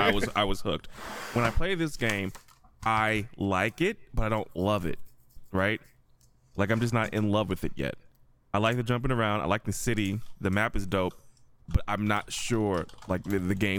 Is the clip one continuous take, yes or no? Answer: yes